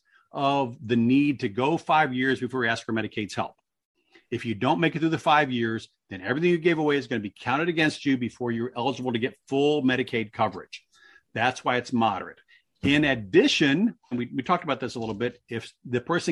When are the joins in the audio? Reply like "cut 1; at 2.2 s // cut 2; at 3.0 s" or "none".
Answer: cut 1; at 14.1 s